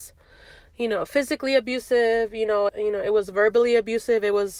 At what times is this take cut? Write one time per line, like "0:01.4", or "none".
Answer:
0:02.7